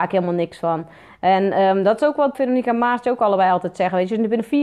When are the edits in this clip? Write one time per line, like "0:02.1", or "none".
0:02.3